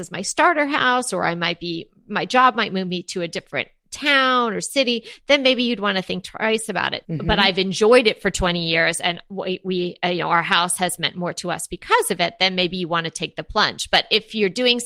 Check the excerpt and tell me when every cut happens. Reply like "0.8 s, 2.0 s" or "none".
7.0 s

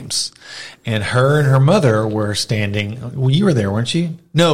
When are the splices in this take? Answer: none

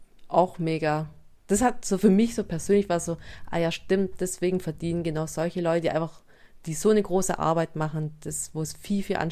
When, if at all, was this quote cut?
none

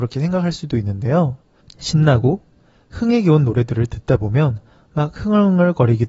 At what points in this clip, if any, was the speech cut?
1.6 s

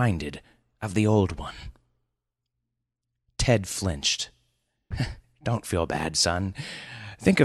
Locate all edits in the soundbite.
4.9 s

